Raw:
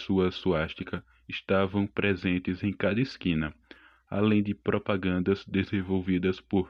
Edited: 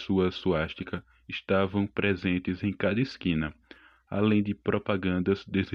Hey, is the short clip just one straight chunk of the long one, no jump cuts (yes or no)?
yes